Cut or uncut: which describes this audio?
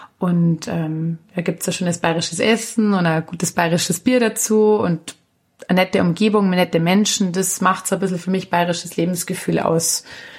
uncut